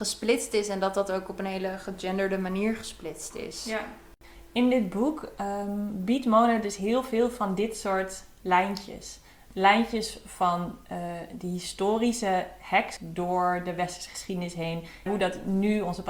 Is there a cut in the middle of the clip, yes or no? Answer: yes